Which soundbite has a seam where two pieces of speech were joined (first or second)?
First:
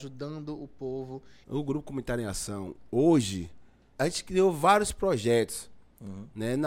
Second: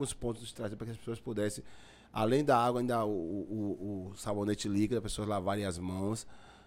first